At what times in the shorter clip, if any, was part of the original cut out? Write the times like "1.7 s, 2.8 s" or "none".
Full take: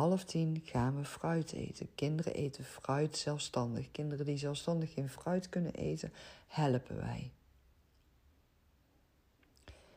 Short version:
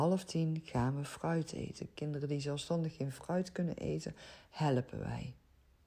2.0 s